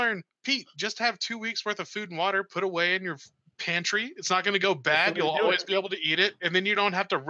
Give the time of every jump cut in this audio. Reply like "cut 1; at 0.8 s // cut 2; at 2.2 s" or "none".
none